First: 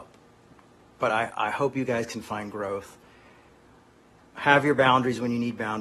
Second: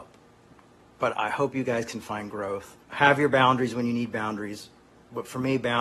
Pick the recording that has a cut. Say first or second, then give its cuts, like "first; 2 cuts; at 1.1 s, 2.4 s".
second; 2 cuts; at 1.1 s, 2.8 s